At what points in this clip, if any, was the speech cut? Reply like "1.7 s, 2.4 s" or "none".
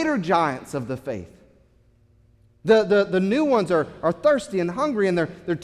none